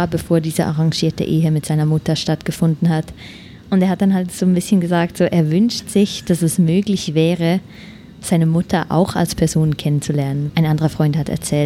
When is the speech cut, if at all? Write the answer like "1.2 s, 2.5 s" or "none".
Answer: 10.5 s